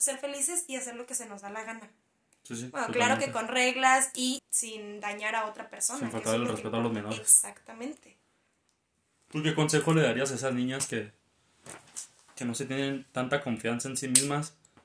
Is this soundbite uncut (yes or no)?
no